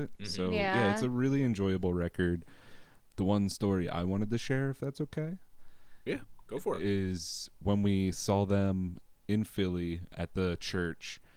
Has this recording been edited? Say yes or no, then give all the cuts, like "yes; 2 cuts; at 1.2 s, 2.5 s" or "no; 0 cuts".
no; 0 cuts